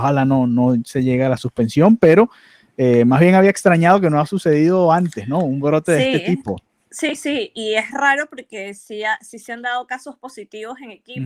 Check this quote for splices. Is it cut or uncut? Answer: uncut